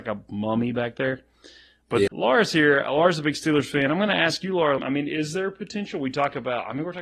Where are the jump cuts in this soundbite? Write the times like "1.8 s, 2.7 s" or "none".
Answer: 2.1 s, 4.8 s